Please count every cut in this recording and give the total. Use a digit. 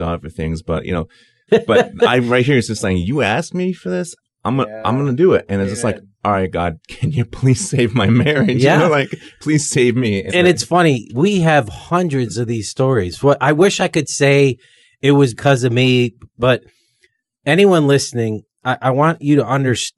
2